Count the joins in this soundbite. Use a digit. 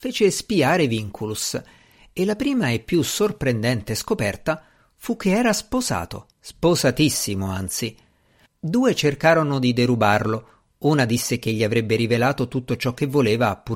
2